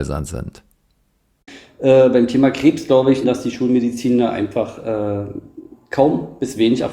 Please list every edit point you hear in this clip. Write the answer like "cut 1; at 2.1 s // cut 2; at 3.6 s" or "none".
cut 1; at 3.2 s